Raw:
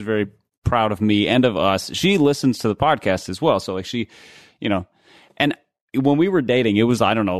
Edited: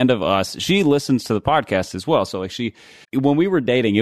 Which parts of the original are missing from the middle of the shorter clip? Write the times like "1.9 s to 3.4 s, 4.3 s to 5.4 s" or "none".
4.4 s to 5.8 s